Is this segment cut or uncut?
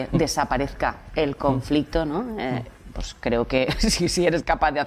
uncut